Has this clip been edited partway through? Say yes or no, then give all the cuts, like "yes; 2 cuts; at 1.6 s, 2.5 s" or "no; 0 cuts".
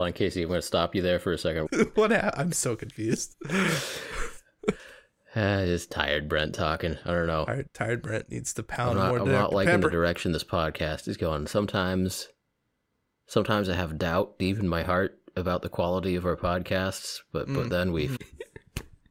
yes; 2 cuts; at 1.7 s, 18.2 s